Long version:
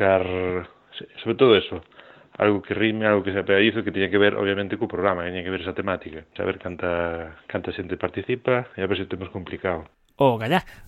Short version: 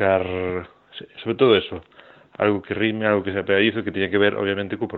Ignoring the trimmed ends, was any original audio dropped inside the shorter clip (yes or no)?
no